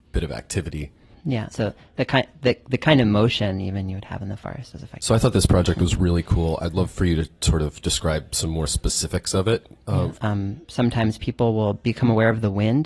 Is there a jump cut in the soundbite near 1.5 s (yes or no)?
yes